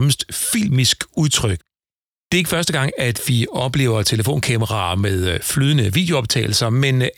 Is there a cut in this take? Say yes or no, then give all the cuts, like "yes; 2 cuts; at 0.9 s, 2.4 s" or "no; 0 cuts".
no; 0 cuts